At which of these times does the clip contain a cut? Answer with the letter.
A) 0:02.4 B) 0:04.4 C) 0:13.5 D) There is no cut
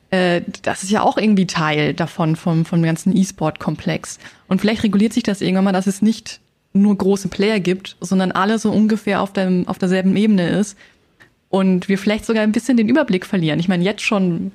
D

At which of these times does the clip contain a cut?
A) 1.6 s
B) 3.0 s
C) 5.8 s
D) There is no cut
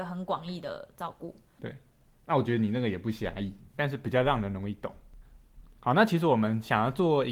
A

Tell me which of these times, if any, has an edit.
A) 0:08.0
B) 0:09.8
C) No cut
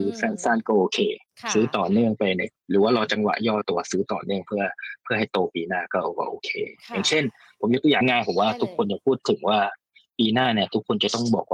A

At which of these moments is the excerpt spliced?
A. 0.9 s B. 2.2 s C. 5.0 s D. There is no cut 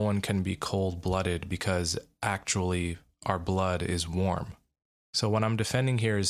C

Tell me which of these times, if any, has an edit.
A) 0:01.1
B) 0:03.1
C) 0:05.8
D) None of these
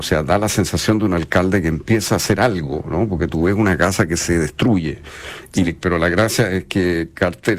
C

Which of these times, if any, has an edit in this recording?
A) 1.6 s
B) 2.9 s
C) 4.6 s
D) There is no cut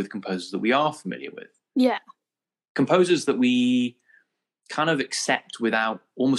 D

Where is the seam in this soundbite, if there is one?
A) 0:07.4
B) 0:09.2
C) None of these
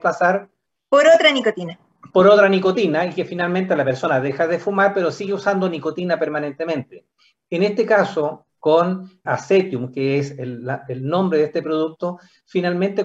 B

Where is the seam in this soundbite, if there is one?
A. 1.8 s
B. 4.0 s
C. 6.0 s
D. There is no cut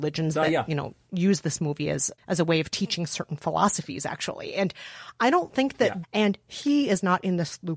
C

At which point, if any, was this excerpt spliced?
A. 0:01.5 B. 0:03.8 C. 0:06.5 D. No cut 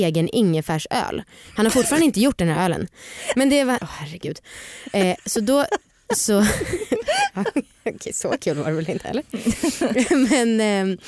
B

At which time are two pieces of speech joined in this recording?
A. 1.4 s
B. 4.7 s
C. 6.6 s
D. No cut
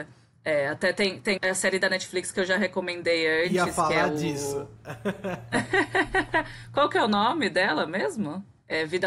A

